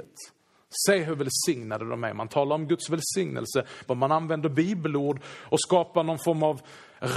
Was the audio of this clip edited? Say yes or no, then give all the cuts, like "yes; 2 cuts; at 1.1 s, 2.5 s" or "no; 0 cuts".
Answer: yes; 1 cut; at 3.9 s